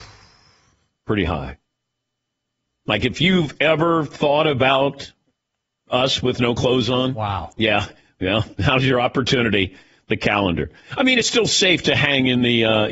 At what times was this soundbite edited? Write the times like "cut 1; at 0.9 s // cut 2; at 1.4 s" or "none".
none